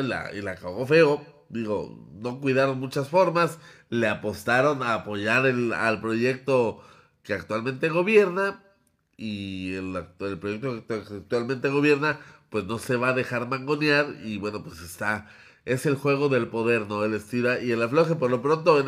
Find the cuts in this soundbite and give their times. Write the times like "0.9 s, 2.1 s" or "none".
none